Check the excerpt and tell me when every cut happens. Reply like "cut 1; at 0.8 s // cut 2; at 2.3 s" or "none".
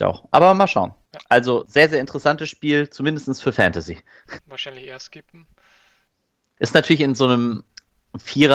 cut 1; at 4.4 s // cut 2; at 6.6 s